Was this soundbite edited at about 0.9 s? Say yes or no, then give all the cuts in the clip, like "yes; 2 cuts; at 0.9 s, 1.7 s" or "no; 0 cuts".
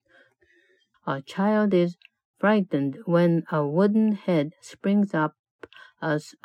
yes; 1 cut; at 0.9 s